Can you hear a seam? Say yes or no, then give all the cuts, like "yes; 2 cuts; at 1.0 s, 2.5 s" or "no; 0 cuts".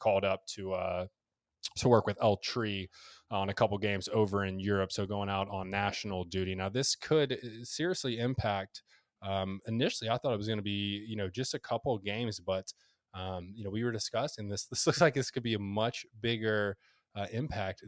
no; 0 cuts